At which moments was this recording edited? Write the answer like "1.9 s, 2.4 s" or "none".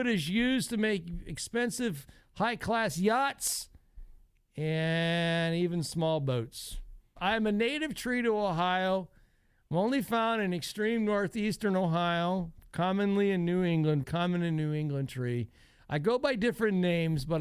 7.2 s, 14.0 s